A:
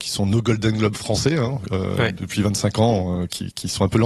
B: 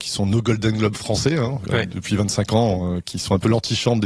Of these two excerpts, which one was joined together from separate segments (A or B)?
B